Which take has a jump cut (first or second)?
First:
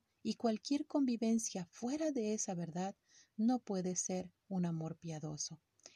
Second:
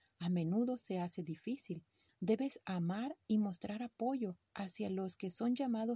second